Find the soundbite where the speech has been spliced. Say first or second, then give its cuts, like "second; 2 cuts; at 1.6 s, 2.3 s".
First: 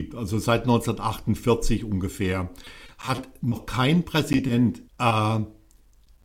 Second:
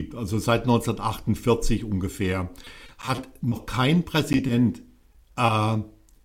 first; 1 cut; at 4.9 s